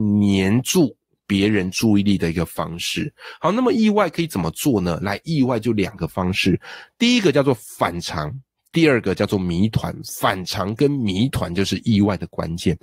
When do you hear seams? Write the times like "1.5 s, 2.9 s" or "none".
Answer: none

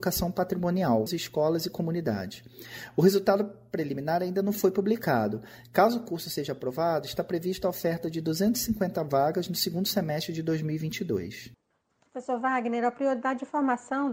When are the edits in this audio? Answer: 1.1 s

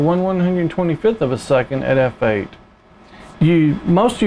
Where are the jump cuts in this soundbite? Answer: 3.3 s

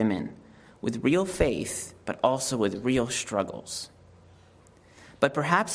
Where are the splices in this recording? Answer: none

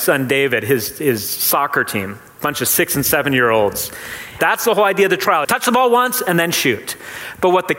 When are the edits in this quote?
4.4 s, 5.4 s

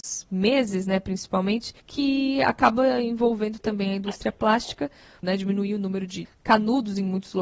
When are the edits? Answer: 1.8 s, 5.2 s, 6.2 s

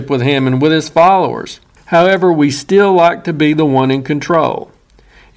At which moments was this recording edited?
1.8 s

